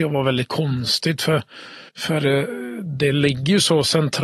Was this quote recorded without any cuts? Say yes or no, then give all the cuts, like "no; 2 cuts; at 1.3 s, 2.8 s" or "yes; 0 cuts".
no; 1 cut; at 1.9 s